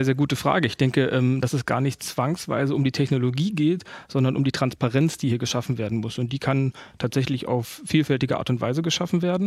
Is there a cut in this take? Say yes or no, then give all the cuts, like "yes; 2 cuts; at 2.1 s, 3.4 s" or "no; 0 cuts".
no; 0 cuts